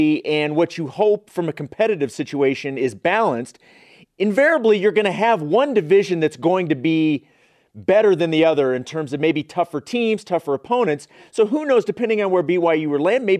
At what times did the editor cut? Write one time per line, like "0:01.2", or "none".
none